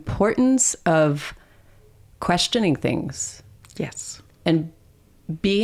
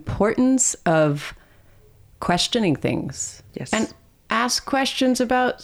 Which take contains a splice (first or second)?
second